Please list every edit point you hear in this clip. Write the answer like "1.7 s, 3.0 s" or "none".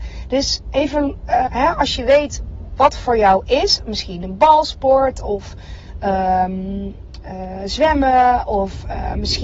1.5 s